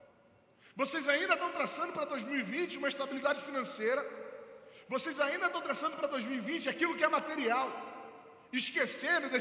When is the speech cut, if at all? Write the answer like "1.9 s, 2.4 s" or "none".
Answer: none